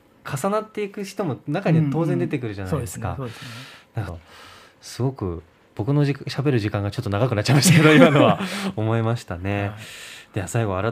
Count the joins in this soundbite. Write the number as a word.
one